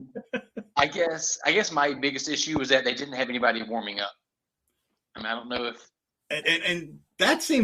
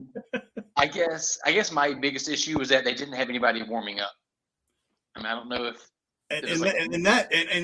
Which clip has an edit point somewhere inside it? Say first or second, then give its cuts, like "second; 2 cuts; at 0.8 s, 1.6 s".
first; 1 cut; at 6.4 s